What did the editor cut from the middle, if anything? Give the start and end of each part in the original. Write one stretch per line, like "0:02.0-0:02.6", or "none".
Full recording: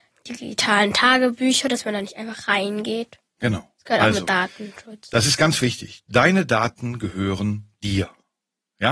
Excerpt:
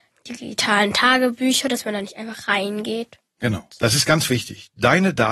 0:03.7-0:05.0